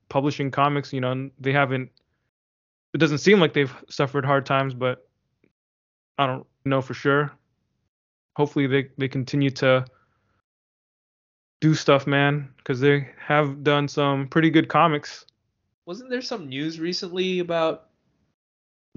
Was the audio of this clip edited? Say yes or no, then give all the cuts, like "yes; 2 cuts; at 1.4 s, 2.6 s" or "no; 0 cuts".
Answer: yes; 1 cut; at 6.7 s